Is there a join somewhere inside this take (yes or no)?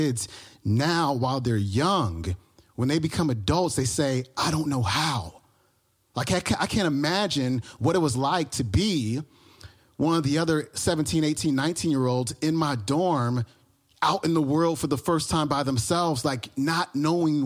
no